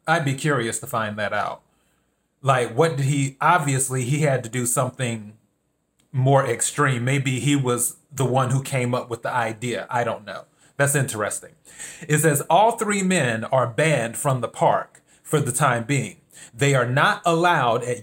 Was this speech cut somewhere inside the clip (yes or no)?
no